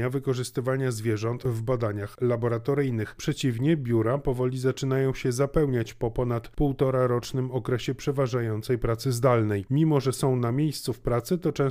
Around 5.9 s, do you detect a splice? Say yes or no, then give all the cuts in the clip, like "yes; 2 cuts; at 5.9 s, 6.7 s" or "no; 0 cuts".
no; 2 cuts; at 3.2 s, 9.6 s